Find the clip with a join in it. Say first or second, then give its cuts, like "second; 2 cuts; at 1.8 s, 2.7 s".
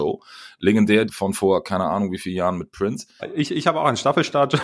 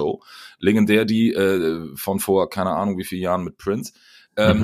first; 2 cuts; at 1.1 s, 3.2 s